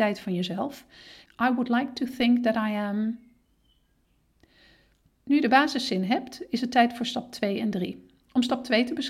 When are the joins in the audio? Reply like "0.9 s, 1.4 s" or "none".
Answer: 1.3 s